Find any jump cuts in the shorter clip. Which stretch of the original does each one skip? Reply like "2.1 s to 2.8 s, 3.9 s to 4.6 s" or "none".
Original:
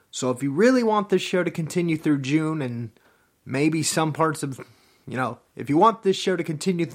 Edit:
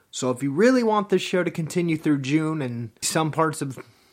3.0 s to 3.8 s